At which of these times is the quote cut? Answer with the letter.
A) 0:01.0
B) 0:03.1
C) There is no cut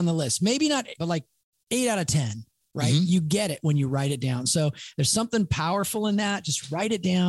A